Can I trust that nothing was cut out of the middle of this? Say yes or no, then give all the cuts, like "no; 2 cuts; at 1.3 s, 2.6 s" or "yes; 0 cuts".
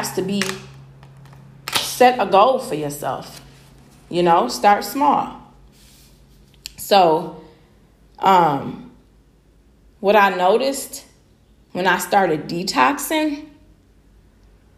no; 1 cut; at 9.9 s